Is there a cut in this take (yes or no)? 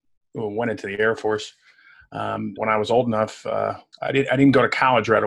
yes